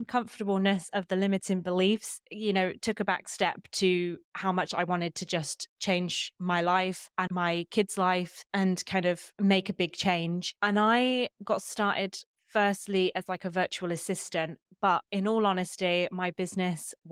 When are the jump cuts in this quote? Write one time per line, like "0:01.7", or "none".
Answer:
0:07.3
0:10.6